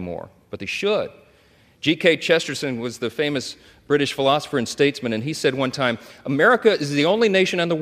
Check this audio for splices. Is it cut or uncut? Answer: uncut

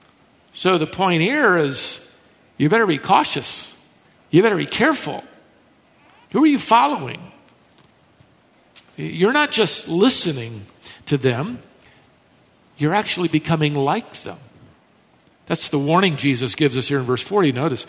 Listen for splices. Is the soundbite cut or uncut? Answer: cut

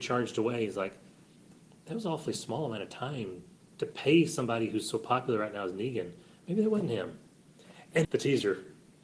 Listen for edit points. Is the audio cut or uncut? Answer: cut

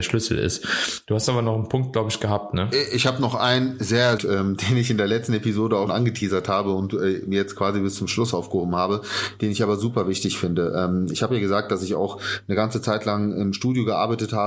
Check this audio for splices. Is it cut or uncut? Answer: cut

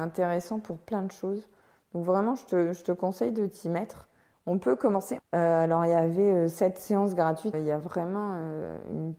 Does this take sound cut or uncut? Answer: cut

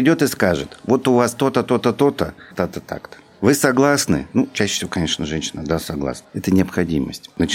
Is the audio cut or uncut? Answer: cut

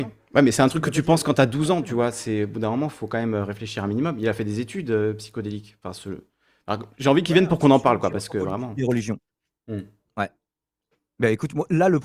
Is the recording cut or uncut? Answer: uncut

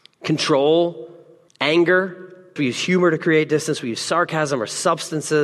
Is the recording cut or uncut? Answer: cut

